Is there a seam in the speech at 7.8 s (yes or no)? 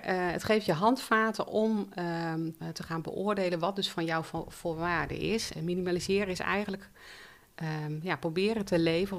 no